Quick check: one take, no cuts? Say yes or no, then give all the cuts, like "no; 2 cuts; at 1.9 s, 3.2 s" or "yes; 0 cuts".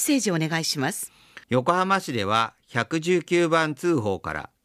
no; 1 cut; at 1.4 s